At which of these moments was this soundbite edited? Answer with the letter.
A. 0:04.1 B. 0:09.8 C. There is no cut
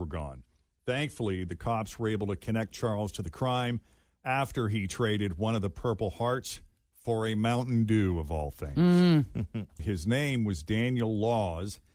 B